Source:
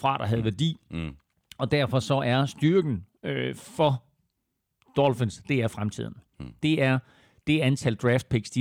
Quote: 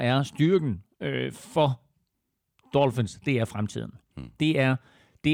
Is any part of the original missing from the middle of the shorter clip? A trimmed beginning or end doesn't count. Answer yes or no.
no